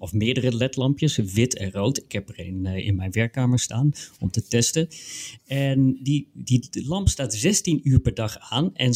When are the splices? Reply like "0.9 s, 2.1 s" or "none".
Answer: none